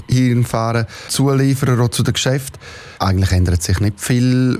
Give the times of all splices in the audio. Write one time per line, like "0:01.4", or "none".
0:03.0

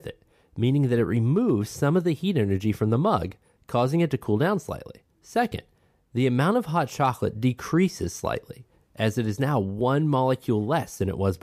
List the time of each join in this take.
0:05.1

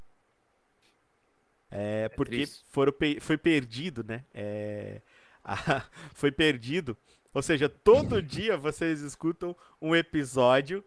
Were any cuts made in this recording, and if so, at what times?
0:01.7
0:07.3

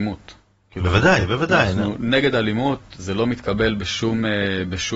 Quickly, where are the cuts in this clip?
none

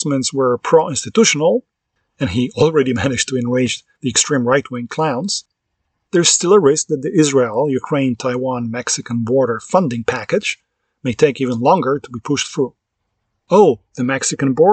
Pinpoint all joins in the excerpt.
none

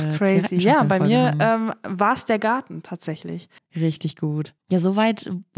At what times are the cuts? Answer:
none

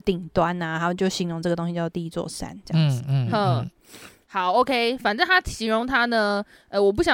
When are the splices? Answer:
none

